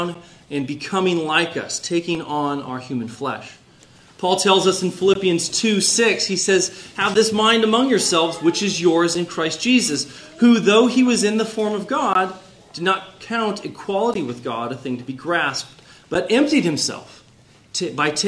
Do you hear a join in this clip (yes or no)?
no